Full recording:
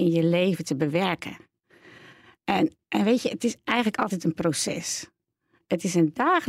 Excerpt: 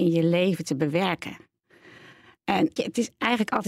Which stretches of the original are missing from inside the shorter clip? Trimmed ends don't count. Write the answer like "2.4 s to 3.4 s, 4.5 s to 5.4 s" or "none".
2.8 s to 3.2 s